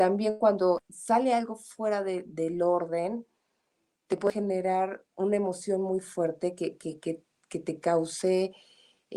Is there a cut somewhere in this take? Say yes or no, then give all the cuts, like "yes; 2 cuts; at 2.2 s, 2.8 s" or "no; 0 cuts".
no; 0 cuts